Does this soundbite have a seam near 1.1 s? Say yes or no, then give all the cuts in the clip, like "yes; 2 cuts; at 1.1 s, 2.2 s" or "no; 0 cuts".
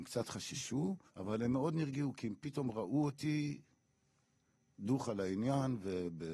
yes; 1 cut; at 1.1 s